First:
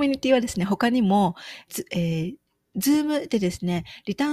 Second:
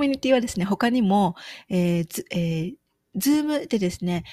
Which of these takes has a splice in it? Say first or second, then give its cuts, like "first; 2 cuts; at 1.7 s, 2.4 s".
first; 1 cut; at 1.7 s